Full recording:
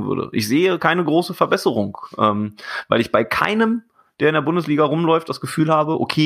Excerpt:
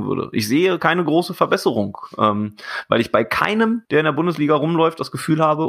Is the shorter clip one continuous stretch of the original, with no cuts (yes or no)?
no